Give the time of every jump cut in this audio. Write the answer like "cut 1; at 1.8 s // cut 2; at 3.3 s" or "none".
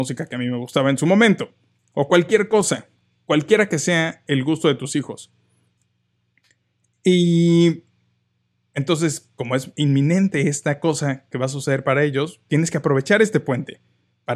none